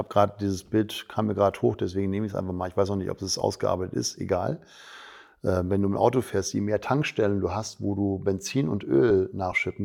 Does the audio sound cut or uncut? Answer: uncut